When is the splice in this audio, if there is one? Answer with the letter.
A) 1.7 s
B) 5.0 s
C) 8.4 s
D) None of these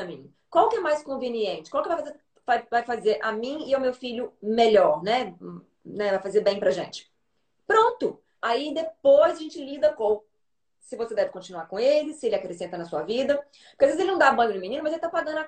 C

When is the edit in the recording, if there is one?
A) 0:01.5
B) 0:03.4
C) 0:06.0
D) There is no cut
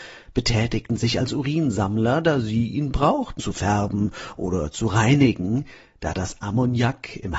B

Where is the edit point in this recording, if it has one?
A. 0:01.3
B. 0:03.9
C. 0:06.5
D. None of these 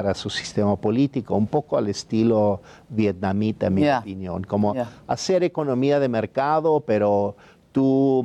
D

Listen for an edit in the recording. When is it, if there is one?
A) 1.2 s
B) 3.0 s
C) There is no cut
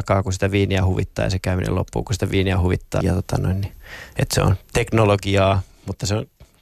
B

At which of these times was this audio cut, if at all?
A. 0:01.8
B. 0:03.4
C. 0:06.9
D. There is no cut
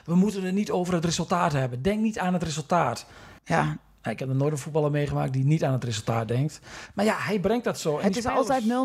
B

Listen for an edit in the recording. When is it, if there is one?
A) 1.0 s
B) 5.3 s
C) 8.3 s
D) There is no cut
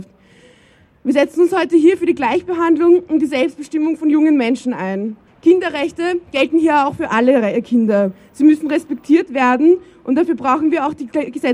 B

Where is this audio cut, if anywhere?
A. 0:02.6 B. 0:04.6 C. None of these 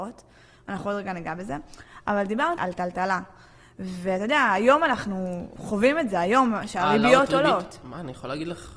A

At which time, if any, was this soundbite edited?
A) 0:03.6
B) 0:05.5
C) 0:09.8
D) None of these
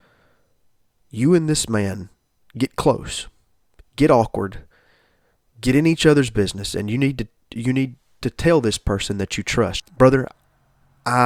C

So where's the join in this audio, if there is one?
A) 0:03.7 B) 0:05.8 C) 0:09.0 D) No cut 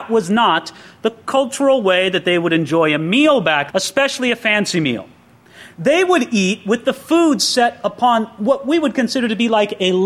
A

